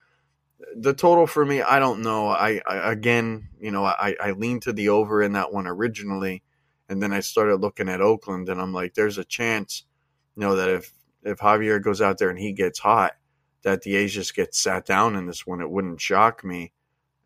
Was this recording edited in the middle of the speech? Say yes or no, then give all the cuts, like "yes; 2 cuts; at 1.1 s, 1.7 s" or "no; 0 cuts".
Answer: no; 0 cuts